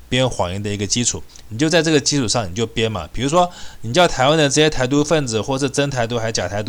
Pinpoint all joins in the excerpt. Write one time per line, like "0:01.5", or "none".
none